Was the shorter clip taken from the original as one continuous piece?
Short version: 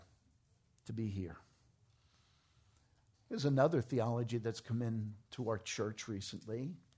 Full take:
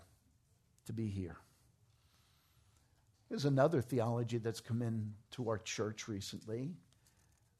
yes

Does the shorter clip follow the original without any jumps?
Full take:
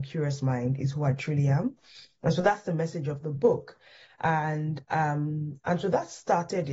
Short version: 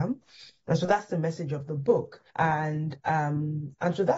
no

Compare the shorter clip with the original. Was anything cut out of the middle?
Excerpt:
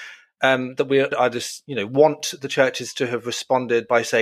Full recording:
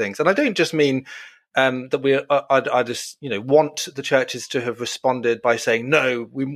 yes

